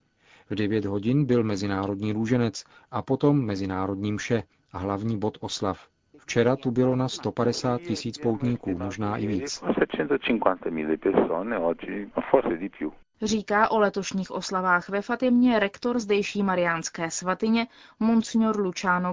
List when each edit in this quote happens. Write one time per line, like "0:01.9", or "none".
0:06.1